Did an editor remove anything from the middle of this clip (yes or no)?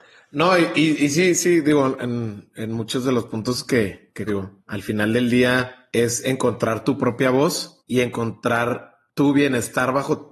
yes